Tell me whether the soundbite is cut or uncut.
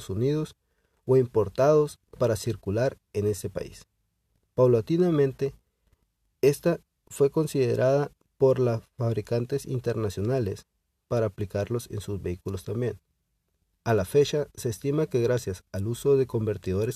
uncut